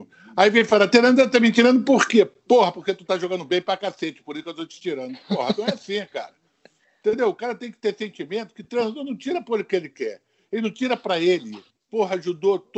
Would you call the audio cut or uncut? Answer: cut